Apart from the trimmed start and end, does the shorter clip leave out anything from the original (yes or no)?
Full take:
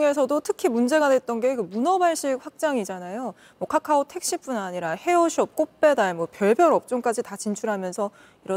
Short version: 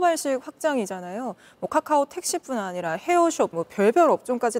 yes